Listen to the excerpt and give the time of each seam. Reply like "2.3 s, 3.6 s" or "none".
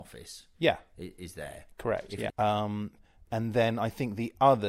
2.3 s